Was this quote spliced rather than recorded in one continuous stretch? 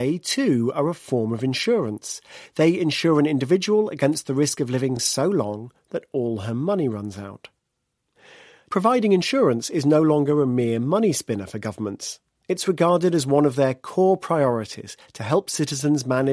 no; 0 cuts

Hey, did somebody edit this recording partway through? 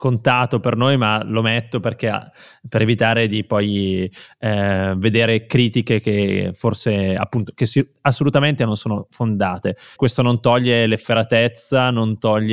yes; 1 cut; at 9.9 s

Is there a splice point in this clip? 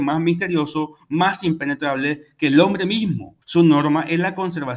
yes; 1 cut; at 3.4 s

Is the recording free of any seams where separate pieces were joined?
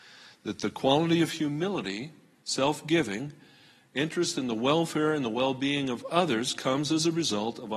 yes; 0 cuts

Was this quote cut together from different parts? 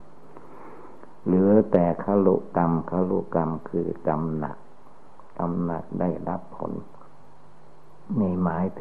no; 0 cuts

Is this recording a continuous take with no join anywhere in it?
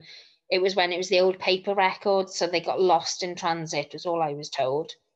yes; 0 cuts

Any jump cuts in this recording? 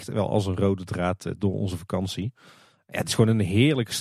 no; 0 cuts

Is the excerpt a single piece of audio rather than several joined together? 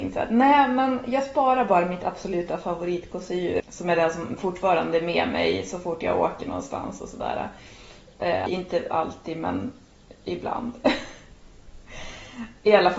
no; 2 cuts; at 3.6 s, 8.5 s

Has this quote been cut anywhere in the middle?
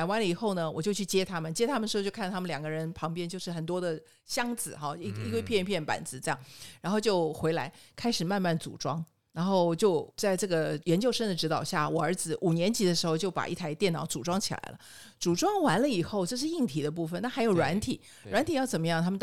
no; 0 cuts

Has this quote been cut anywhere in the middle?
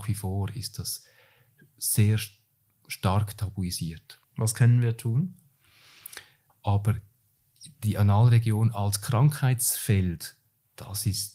yes; 2 cuts; at 4.2 s, 6.5 s

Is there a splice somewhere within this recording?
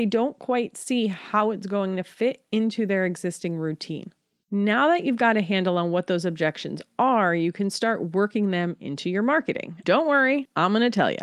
yes; 1 cut; at 9.8 s

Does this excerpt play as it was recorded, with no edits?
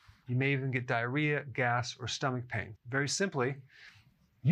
no; 1 cut; at 2.8 s

